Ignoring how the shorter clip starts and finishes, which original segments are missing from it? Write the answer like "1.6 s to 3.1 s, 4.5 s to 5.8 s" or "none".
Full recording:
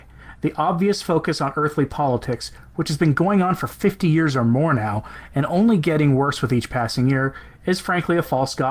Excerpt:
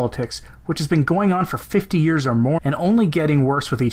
4.7 s to 5.3 s

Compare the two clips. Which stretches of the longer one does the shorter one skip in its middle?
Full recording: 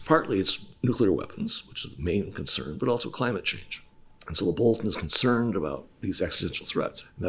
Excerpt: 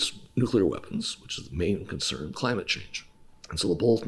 2.8 s to 3.1 s

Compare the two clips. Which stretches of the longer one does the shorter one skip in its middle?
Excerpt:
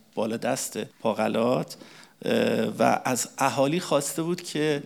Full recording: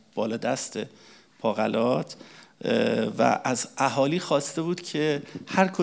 0.9 s to 1.3 s

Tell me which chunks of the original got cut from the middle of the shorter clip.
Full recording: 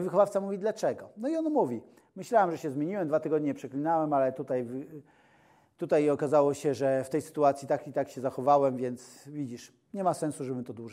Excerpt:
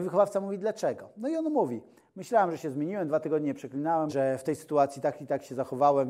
4.1 s to 6.7 s

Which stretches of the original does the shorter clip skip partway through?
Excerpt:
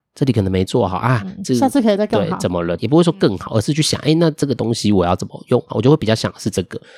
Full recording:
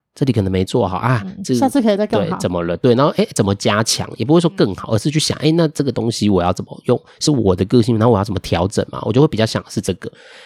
2.8 s to 4.2 s, 7.1 s to 9.0 s

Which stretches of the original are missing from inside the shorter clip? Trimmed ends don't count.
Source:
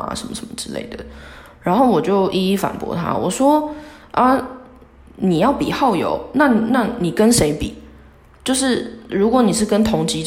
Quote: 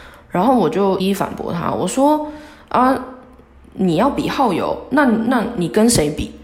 2.3 s to 2.4 s

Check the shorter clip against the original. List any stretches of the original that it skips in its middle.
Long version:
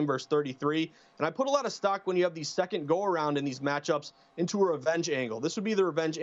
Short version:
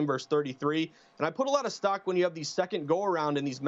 none

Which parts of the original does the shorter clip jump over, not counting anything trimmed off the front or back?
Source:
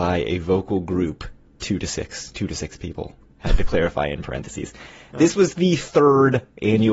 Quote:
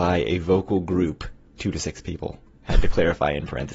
1.6 s to 2.3 s

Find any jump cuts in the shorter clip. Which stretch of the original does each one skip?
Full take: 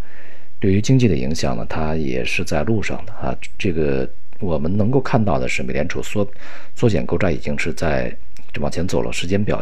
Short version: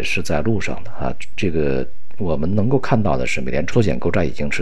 5.9 s to 6.8 s

